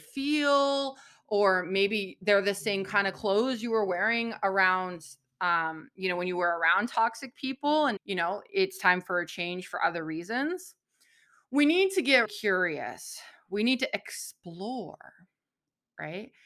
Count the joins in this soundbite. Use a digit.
2